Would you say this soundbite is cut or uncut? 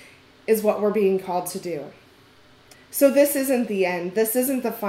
cut